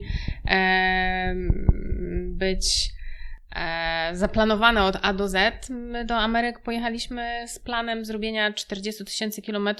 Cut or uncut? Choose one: uncut